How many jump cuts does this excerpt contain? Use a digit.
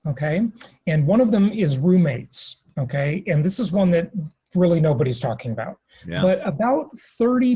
0